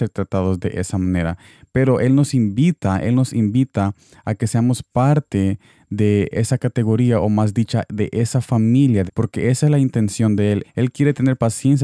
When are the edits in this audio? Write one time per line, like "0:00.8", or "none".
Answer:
0:09.1
0:10.6